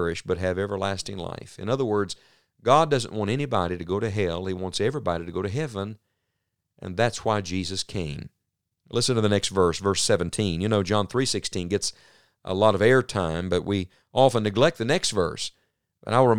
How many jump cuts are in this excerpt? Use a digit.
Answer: 0